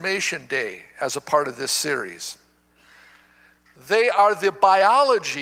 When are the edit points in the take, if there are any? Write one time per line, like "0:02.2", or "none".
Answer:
0:03.8